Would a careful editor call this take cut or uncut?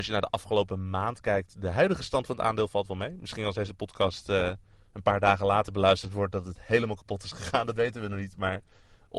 uncut